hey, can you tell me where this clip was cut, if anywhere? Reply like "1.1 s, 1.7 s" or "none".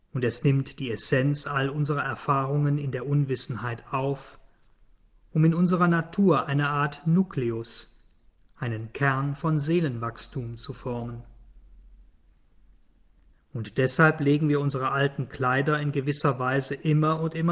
13.3 s